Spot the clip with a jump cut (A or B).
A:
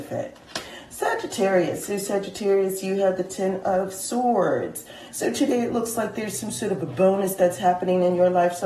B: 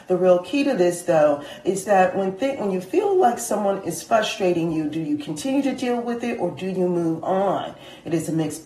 A